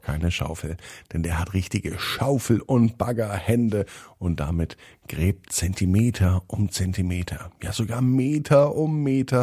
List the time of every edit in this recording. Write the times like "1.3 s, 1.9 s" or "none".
5.4 s